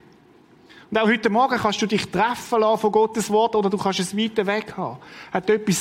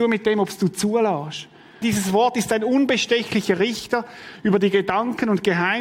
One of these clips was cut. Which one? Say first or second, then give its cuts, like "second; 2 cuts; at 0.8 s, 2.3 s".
second; 1 cut; at 1.8 s